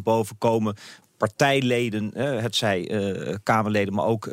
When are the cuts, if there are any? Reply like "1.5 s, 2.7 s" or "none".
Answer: 1.0 s